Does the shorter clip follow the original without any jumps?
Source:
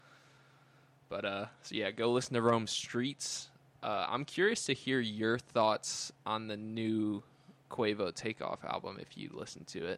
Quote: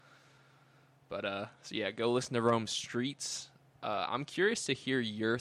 yes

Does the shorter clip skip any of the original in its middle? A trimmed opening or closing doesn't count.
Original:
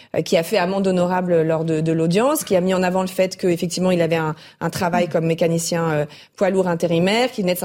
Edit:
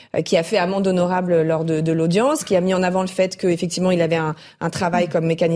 no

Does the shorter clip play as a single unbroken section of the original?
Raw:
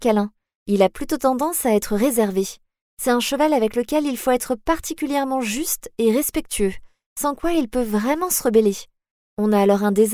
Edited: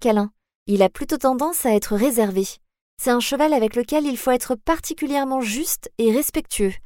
yes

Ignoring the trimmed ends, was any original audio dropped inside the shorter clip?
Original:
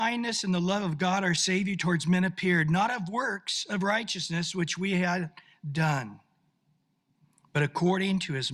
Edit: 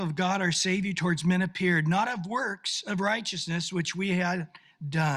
no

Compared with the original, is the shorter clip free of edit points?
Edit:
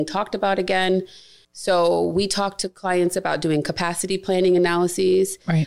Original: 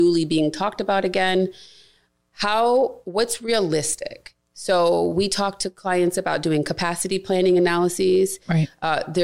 no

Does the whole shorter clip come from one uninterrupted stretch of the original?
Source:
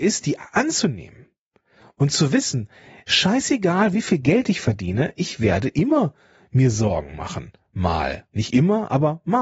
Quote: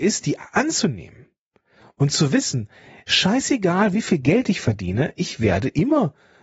yes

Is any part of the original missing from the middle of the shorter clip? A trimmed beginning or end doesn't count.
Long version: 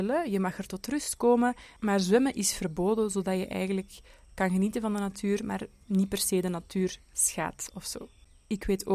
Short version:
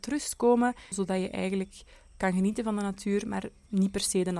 yes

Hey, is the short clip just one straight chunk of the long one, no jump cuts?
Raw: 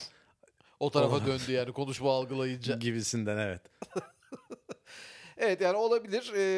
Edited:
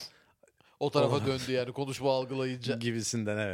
yes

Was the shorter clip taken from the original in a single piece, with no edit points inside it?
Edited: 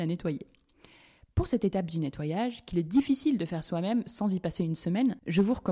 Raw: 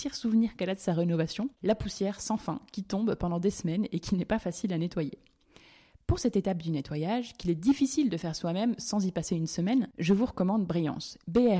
yes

